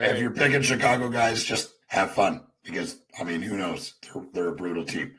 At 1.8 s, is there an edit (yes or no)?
yes